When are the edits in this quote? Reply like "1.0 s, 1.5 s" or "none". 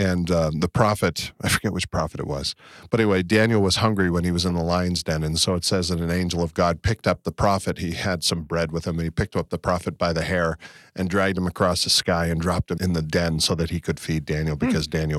none